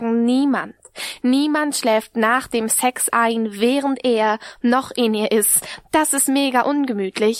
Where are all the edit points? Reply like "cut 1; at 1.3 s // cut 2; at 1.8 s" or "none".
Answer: none